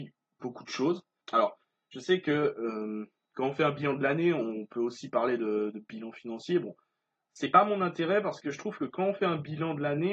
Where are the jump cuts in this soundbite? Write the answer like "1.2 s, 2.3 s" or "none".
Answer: 1.2 s